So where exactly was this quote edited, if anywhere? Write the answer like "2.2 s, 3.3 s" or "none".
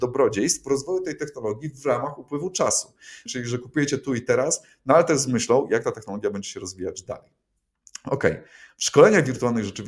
3.3 s